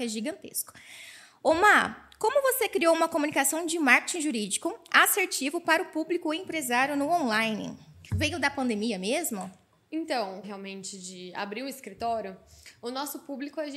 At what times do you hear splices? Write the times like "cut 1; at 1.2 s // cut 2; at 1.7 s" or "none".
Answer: cut 1; at 8.1 s // cut 2; at 10.4 s